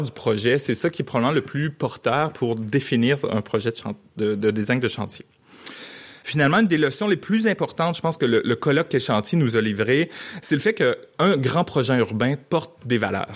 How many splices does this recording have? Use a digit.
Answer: 1